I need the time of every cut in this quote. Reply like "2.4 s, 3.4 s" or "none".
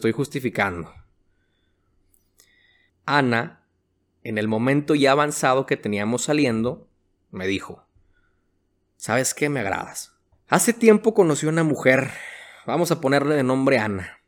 2.9 s, 10.3 s